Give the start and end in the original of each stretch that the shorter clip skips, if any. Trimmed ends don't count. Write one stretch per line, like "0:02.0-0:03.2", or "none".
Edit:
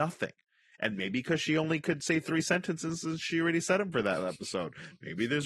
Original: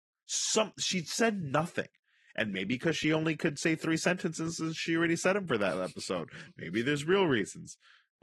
none